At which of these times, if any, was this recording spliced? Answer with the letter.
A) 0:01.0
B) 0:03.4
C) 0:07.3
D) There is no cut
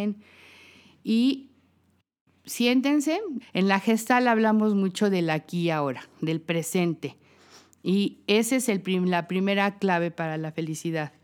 B